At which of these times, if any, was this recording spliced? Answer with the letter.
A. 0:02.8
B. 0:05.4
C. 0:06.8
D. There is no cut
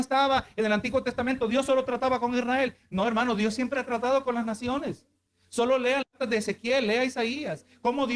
D